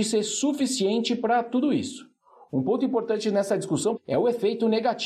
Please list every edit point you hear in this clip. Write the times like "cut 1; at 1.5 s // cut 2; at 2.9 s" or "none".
cut 1; at 4.0 s